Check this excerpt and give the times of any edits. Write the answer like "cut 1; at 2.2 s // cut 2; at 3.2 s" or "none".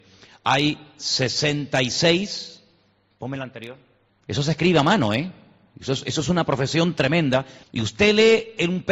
cut 1; at 4.1 s // cut 2; at 7.6 s